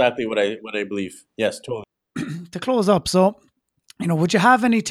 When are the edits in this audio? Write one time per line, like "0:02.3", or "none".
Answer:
none